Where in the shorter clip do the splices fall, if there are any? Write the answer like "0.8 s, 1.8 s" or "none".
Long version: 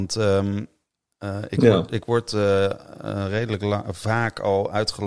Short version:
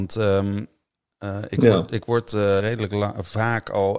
2.6 s